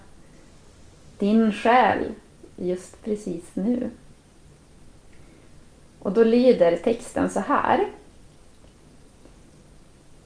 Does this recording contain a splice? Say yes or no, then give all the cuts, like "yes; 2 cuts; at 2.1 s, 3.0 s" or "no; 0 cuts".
no; 0 cuts